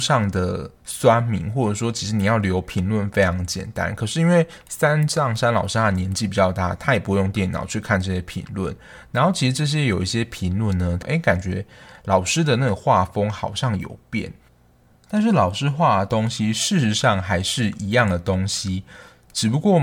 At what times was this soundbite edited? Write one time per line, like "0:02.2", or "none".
0:11.0